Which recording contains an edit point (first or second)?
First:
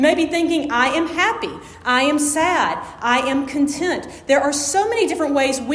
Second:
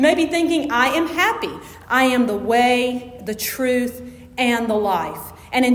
second